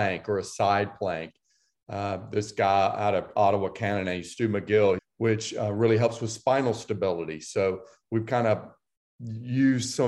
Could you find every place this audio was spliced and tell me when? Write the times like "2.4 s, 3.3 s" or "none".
5.0 s